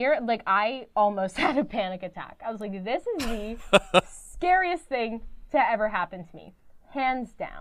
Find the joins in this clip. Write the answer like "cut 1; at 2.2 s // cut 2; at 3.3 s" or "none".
cut 1; at 0.9 s